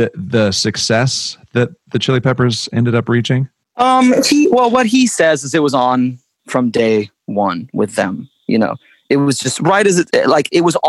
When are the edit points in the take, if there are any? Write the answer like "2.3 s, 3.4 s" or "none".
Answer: none